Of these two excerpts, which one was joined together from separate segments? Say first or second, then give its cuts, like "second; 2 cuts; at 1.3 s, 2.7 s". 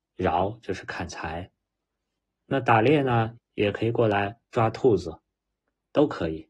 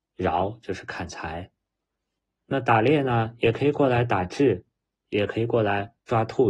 first; 1 cut; at 3.4 s